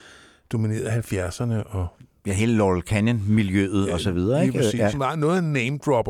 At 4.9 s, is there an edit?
yes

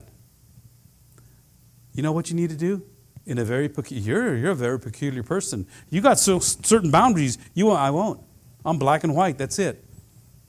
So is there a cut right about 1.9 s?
no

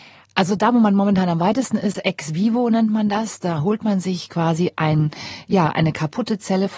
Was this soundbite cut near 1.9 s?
yes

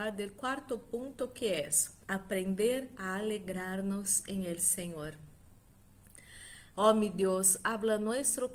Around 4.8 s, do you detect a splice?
no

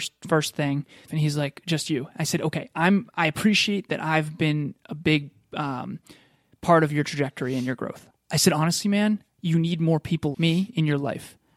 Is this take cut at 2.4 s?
no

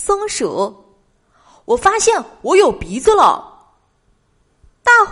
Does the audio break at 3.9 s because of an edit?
no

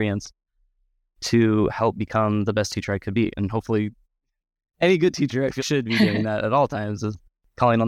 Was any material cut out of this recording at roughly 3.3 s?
yes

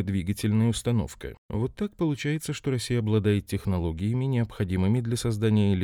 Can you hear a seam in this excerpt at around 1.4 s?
yes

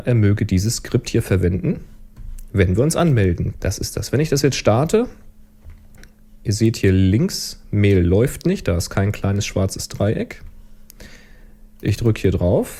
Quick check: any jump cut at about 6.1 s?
no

